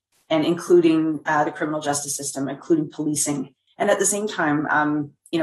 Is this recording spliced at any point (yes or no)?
yes